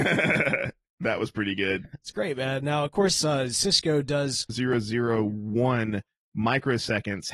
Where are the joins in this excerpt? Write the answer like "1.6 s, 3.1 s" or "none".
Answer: 4.5 s